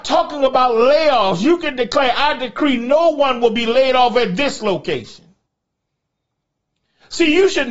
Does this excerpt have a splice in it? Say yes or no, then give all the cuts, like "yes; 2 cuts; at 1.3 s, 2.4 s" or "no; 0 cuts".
no; 0 cuts